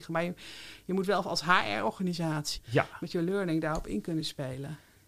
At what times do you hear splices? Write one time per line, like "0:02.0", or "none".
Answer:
0:02.6